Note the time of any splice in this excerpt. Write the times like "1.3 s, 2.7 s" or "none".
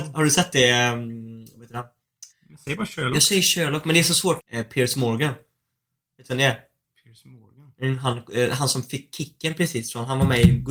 2.3 s, 4.4 s